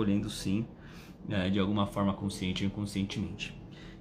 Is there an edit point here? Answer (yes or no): no